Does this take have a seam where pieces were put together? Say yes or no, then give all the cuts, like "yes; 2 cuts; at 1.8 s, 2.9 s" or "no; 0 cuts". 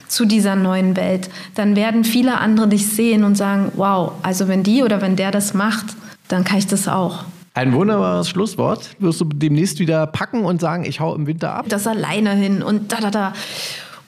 yes; 2 cuts; at 9.0 s, 11.6 s